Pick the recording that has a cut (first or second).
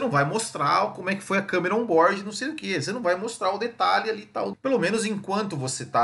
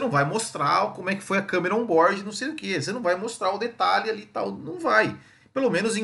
first